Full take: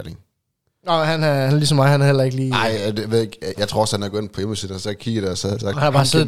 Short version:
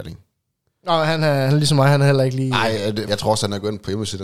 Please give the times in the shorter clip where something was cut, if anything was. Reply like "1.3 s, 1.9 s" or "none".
3.0 s